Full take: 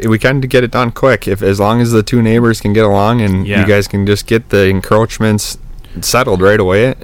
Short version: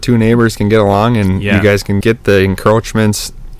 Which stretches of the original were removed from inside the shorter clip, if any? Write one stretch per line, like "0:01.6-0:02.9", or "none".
0:04.1-0:04.3